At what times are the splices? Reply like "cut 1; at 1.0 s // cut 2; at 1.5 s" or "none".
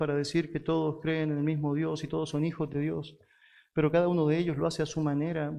none